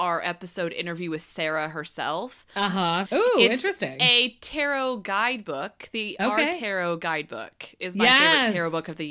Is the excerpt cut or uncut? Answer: cut